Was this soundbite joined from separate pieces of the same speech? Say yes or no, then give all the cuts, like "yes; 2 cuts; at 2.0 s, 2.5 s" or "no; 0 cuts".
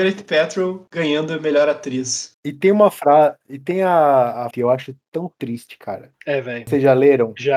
yes; 1 cut; at 4.5 s